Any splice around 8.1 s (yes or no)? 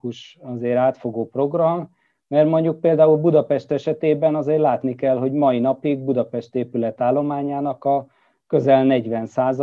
no